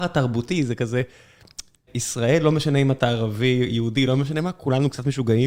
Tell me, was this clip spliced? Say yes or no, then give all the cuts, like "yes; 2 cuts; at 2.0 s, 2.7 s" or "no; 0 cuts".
yes; 1 cut; at 1.9 s